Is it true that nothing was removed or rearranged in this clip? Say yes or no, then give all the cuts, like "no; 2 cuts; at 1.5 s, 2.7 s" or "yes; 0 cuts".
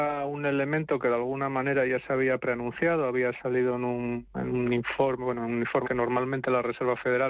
no; 1 cut; at 5.8 s